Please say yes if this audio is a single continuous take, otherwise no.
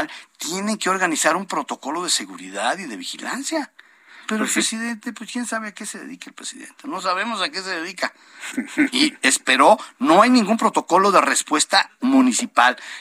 yes